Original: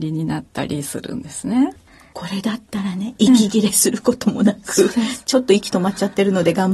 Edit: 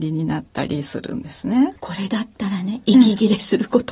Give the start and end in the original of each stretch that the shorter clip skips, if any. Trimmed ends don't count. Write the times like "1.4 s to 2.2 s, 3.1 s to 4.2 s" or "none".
1.8 s to 2.1 s